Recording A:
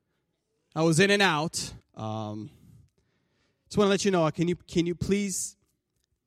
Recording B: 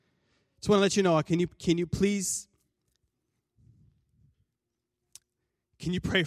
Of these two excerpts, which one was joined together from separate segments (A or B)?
A